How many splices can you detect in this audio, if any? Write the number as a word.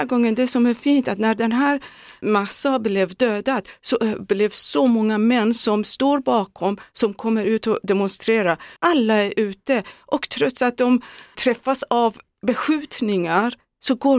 one